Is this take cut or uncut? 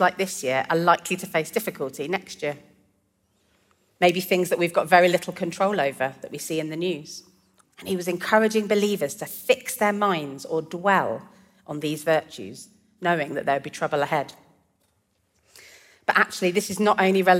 cut